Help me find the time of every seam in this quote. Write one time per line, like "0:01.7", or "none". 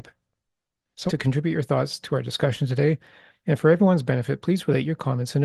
0:01.1
0:03.3